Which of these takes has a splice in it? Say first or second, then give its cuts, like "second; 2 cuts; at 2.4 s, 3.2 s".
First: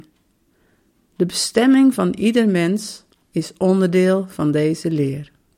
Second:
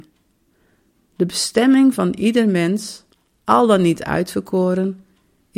first; 1 cut; at 3.2 s